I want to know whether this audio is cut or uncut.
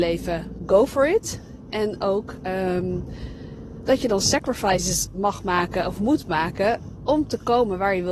uncut